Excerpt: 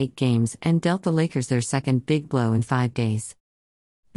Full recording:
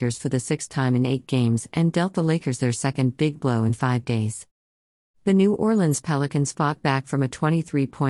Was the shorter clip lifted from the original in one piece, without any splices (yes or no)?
yes